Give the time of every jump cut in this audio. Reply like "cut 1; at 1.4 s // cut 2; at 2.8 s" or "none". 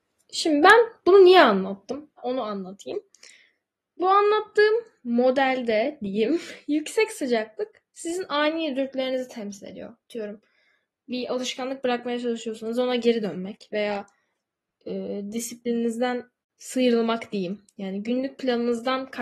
cut 1; at 2.2 s